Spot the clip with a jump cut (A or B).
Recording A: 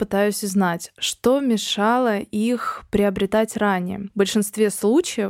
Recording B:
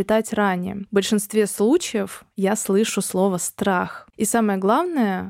B